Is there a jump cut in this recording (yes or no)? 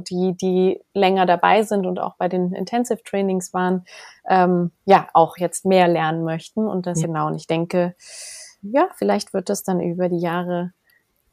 yes